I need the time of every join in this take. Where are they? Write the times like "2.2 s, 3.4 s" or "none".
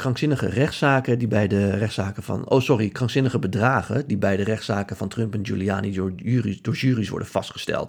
none